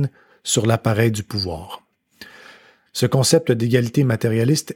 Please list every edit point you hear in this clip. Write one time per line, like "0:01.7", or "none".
0:02.9